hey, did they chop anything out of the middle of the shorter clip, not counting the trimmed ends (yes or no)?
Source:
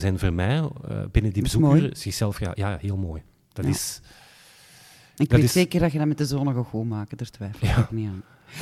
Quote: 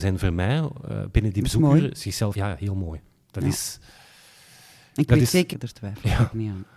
yes